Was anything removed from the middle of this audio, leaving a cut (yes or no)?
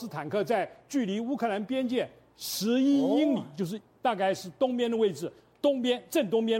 no